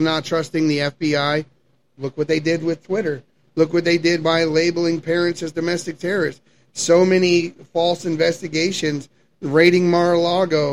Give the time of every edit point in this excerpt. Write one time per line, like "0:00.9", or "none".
none